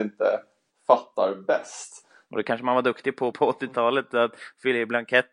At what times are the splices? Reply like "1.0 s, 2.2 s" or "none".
2.3 s, 3.3 s